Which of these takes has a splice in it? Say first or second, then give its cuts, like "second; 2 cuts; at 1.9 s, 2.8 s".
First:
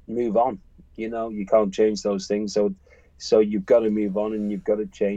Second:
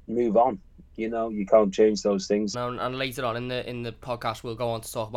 second; 1 cut; at 2.5 s